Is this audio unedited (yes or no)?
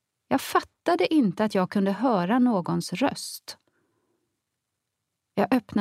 yes